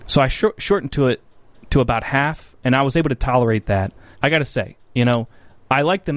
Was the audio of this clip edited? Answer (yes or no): yes